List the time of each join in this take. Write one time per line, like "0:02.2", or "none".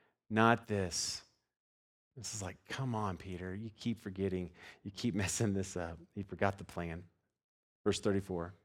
none